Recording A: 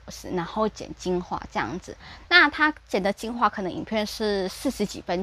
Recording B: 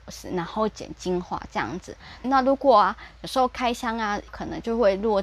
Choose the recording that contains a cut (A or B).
B